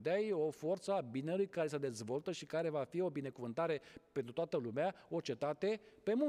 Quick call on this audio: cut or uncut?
uncut